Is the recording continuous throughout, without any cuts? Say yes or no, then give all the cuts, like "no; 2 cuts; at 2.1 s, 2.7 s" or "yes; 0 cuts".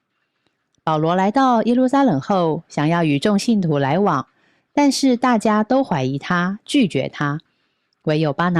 yes; 0 cuts